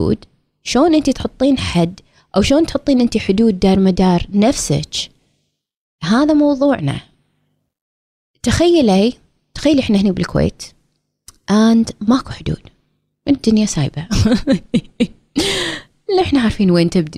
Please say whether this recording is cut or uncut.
uncut